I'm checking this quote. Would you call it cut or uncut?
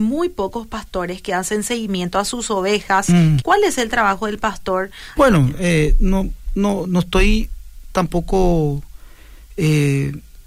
cut